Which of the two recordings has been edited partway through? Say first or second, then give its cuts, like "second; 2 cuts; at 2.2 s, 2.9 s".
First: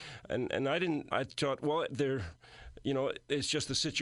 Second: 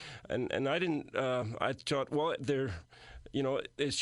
first; 1 cut; at 1.1 s